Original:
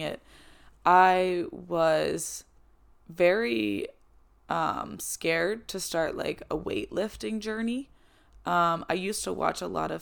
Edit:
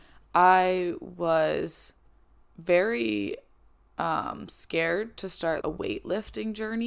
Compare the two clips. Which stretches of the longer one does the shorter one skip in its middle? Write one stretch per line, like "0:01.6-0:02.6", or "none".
0:06.1-0:06.5